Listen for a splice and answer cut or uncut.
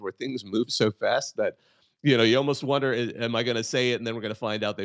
uncut